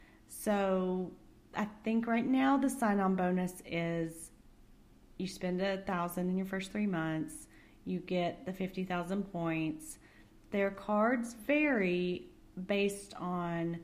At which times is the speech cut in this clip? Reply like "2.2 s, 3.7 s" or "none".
none